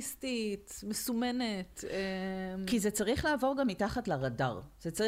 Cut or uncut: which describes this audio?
uncut